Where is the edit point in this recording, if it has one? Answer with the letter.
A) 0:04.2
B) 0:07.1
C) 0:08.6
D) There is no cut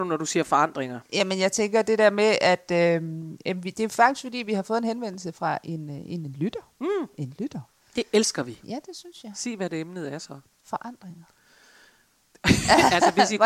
C